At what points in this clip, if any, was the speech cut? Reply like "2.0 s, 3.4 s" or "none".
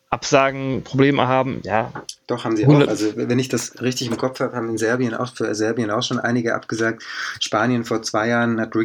none